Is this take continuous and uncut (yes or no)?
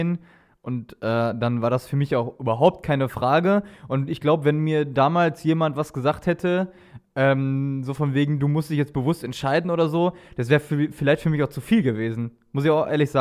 yes